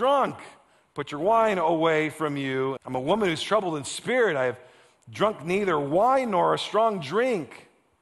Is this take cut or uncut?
cut